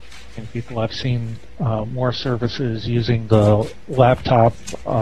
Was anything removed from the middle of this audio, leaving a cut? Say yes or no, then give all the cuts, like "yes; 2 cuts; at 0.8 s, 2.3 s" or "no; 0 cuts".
no; 0 cuts